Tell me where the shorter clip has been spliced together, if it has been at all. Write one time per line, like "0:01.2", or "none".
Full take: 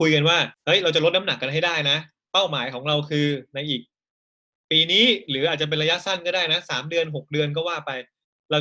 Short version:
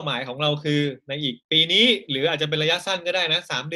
0:01.4